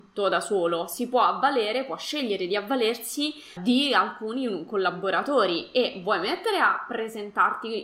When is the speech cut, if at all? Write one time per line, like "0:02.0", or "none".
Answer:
0:03.6